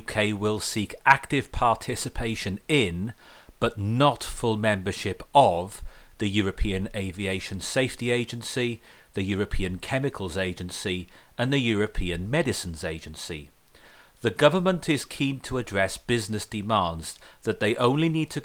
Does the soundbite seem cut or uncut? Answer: uncut